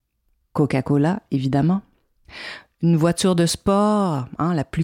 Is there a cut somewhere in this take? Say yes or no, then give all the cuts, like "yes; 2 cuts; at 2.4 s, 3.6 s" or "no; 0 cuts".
no; 0 cuts